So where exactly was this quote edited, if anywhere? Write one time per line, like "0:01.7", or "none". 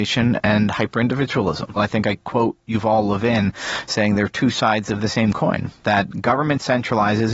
0:01.8